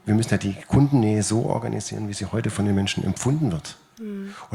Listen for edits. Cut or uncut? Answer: uncut